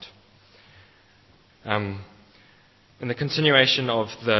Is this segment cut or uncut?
cut